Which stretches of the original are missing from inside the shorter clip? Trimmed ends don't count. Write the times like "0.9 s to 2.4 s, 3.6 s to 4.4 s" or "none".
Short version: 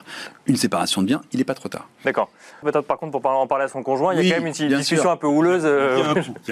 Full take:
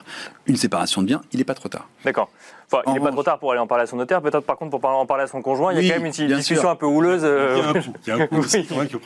2.6 s to 4.2 s